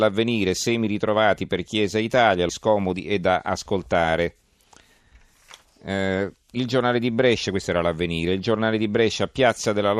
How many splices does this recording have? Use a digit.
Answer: 1